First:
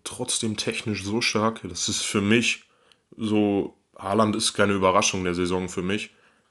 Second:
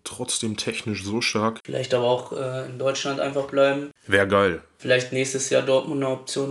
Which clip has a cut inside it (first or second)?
second